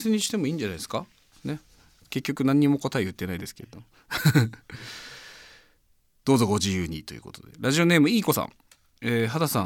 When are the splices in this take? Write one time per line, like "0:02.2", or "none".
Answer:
none